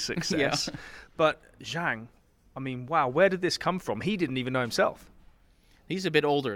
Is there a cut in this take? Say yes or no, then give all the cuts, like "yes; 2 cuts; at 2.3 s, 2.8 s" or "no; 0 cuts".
no; 0 cuts